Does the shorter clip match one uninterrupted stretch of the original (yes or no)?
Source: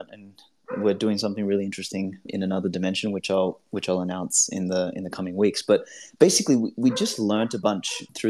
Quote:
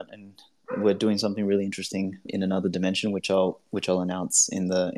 yes